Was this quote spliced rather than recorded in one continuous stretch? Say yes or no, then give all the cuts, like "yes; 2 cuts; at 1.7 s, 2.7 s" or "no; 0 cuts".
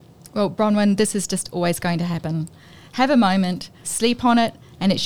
yes; 1 cut; at 3.8 s